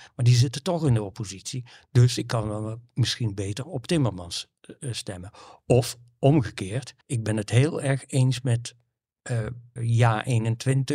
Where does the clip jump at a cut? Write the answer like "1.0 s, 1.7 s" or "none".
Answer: 7.0 s, 9.8 s